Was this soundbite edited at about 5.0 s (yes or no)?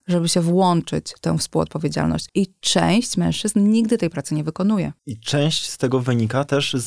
yes